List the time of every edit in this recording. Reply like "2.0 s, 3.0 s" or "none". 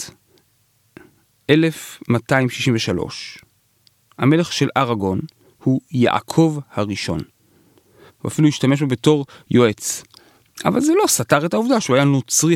8.1 s